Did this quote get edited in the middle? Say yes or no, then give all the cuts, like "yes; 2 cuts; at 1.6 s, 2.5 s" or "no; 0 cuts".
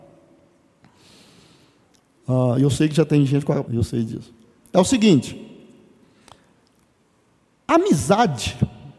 yes; 1 cut; at 3.6 s